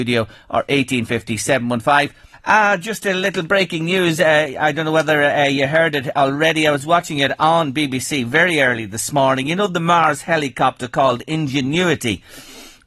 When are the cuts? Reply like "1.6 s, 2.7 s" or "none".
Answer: 2.3 s